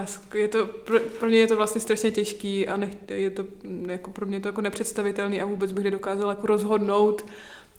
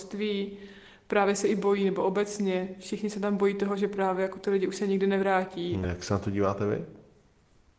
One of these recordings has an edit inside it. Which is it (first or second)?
second